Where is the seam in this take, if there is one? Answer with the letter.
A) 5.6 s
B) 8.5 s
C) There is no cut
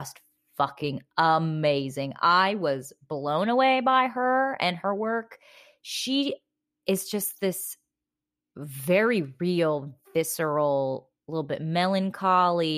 C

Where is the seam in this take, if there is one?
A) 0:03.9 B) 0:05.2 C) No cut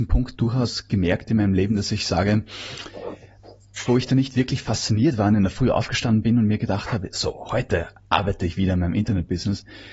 A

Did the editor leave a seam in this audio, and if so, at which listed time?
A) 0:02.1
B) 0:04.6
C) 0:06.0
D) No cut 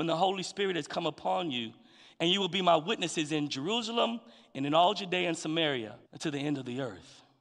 C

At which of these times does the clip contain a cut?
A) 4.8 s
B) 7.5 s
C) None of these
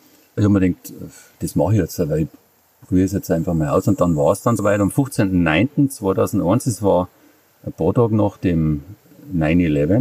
C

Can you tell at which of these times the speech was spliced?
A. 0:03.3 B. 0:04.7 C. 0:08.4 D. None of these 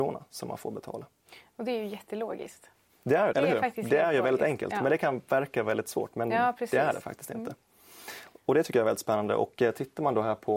A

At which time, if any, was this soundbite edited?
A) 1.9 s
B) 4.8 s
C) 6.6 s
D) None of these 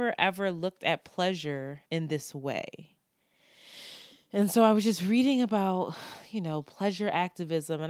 A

